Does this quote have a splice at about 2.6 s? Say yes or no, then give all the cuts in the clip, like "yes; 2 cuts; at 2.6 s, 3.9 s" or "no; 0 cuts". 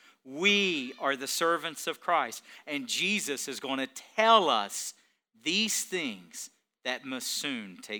no; 0 cuts